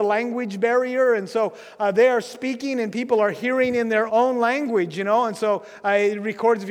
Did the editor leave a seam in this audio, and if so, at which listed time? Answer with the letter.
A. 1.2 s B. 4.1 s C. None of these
B